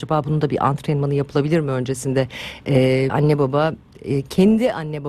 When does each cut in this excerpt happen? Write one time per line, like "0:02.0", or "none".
0:03.1